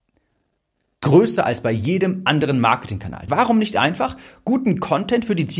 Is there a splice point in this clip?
yes; 1 cut; at 3.3 s

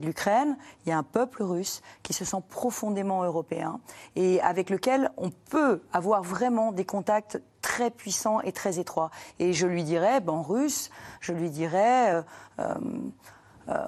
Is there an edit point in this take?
no; 0 cuts

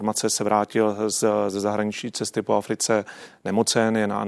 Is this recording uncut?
yes; 0 cuts

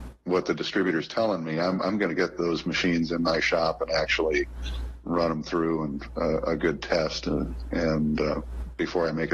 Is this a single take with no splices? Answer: yes; 0 cuts

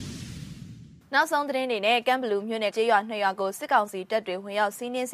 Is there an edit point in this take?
yes; 1 cut; at 2.7 s

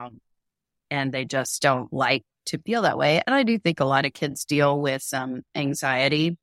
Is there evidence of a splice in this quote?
no; 0 cuts

